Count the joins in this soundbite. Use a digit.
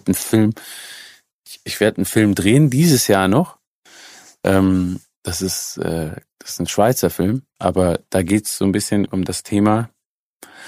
2